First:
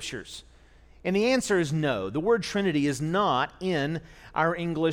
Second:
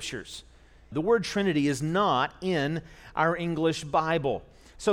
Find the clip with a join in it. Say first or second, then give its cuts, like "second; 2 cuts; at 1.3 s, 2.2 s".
second; 1 cut; at 0.9 s